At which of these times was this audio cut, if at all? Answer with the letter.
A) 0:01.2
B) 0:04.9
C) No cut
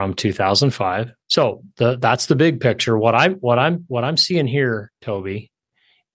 A